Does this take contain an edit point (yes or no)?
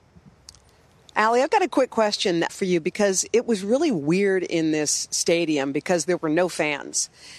yes